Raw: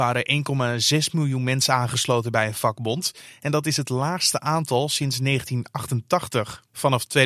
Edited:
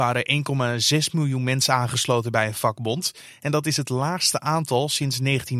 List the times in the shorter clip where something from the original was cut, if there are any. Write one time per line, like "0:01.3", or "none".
none